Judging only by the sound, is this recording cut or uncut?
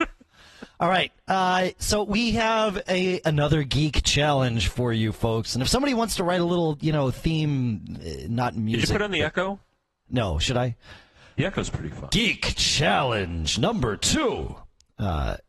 uncut